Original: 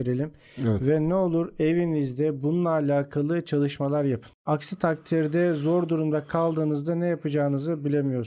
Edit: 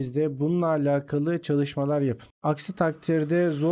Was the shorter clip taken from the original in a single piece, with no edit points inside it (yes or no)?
yes